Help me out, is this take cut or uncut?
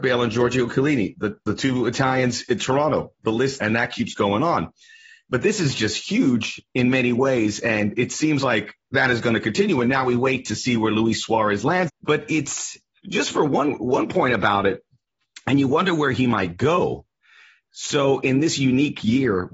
cut